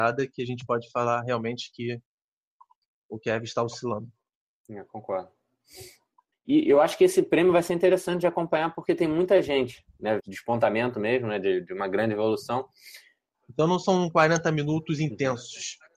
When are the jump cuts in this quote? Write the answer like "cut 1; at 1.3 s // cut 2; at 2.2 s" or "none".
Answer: cut 1; at 6.3 s // cut 2; at 10.2 s // cut 3; at 13.3 s